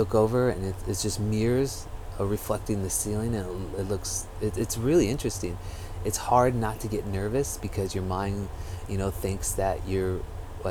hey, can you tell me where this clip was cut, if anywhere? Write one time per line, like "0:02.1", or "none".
none